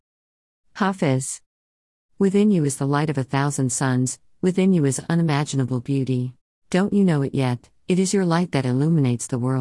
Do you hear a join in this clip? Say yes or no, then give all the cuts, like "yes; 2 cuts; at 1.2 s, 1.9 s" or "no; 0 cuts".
yes; 1 cut; at 6.5 s